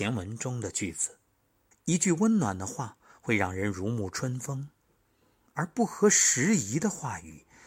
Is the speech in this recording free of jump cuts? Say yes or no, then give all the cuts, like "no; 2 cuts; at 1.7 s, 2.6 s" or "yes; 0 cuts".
no; 1 cut; at 1.7 s